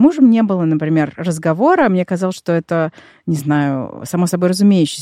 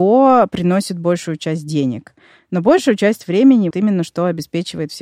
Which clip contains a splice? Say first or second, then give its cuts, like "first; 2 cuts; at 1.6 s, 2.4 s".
second; 1 cut; at 3.7 s